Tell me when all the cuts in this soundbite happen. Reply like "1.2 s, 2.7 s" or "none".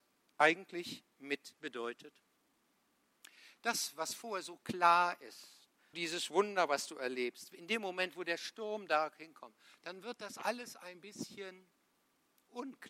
5.9 s